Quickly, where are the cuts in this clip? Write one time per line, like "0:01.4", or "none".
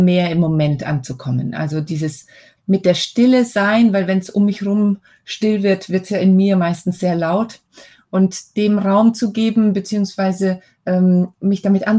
0:02.6